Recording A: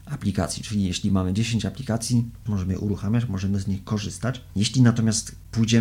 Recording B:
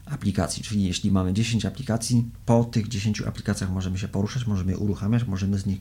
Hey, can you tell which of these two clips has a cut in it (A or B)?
A